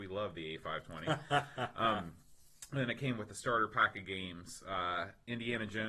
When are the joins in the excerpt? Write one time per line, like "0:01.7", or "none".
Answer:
none